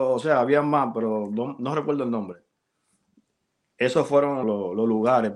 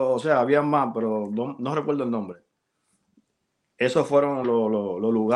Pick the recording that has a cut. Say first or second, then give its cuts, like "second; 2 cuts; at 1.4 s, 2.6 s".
first; 1 cut; at 4.4 s